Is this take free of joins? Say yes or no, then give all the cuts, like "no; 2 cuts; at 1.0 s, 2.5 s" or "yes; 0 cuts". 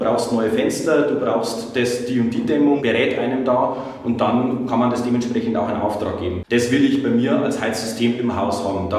no; 2 cuts; at 2.8 s, 6.5 s